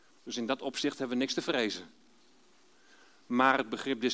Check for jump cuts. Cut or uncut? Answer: uncut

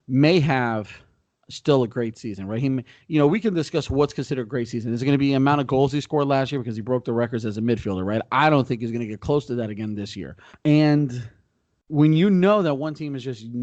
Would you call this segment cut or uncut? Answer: cut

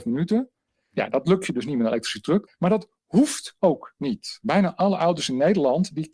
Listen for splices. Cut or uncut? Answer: cut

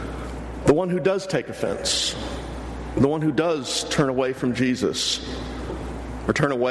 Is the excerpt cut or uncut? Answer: uncut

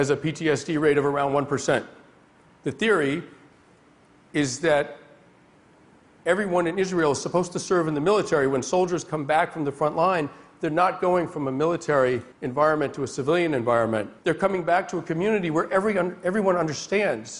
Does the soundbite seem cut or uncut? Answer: cut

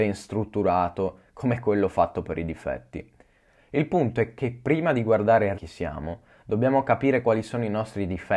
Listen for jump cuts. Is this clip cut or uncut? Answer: cut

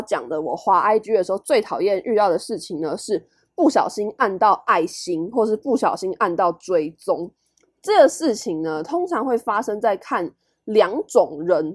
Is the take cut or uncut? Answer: uncut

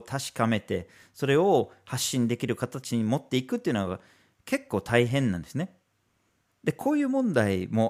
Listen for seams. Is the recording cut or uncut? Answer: cut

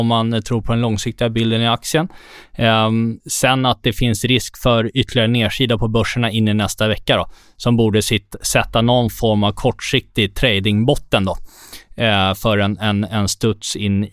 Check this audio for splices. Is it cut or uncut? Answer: cut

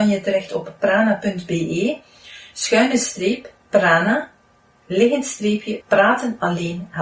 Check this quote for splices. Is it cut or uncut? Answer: cut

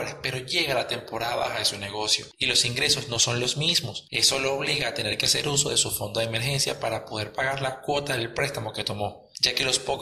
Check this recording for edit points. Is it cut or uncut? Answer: uncut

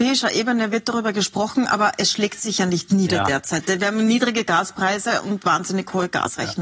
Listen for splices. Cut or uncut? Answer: uncut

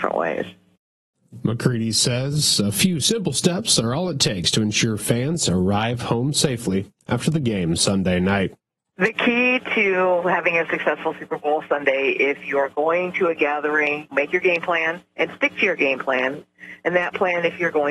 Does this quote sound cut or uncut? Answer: uncut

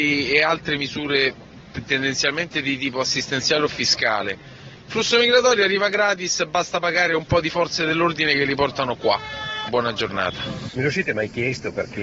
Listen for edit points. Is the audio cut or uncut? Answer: cut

